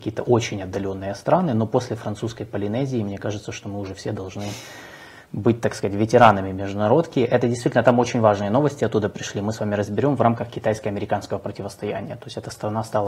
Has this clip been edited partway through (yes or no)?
no